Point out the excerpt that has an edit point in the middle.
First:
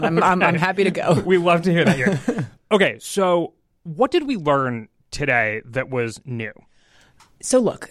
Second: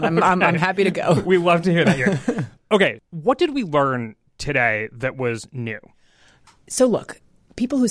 second; 1 cut; at 3.0 s

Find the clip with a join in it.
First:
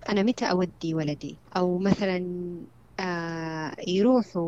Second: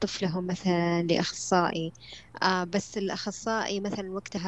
first; 1 cut; at 1.4 s

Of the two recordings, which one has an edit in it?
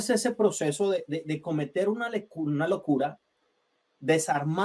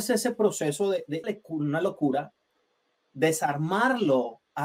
second; 1 cut; at 1.2 s

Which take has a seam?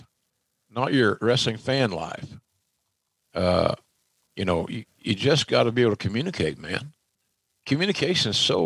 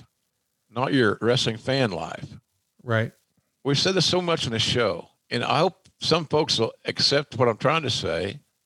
second; 2 cuts; at 2.7 s, 5.2 s

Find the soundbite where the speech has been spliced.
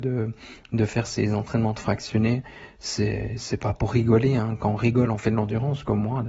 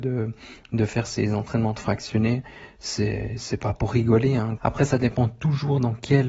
second; 1 cut; at 4.6 s

